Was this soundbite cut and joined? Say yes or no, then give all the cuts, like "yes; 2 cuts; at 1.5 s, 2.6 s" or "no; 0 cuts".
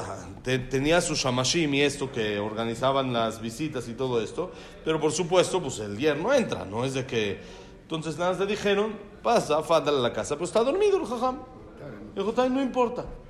no; 0 cuts